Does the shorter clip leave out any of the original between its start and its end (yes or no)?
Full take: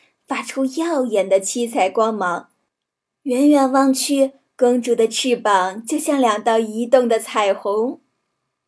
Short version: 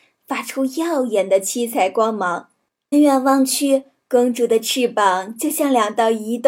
yes